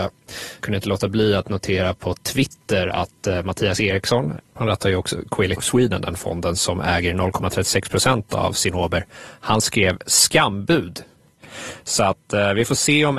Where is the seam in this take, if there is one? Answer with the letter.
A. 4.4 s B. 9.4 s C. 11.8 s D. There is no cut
A